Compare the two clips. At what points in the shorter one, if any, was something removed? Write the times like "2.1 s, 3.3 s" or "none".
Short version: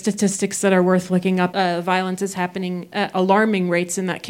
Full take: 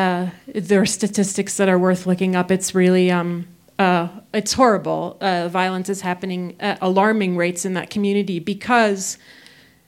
1.5 s